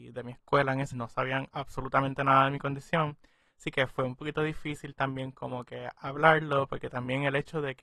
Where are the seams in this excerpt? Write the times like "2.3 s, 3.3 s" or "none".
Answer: 0.9 s